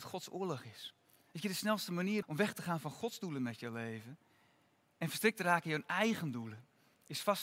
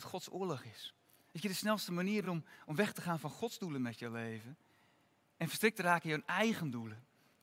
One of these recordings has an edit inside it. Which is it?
first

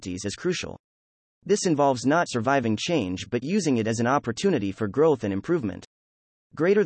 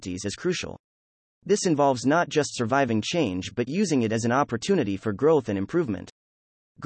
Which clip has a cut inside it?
first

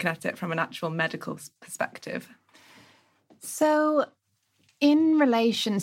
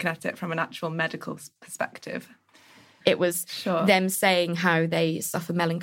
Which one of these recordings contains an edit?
second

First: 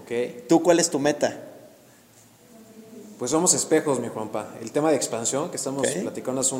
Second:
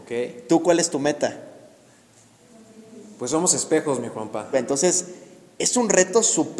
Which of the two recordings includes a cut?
second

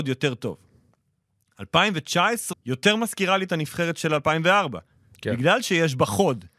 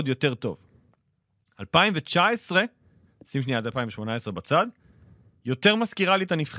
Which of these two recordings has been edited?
first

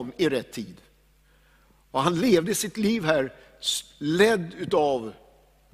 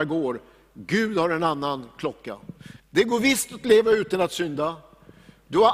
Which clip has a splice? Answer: second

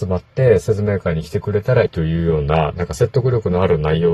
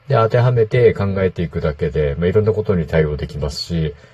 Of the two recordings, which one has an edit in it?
first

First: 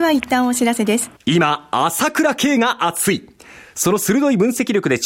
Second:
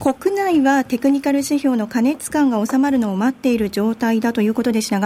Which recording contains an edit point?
first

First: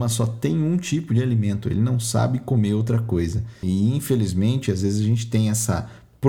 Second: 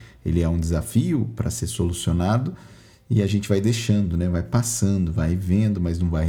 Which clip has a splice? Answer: first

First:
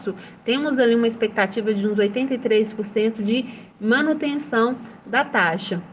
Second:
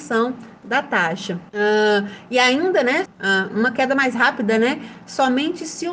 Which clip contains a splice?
second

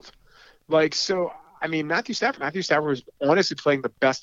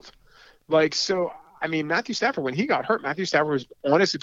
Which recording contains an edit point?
first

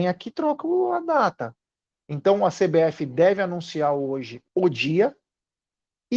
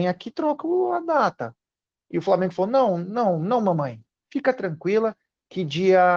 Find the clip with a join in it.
first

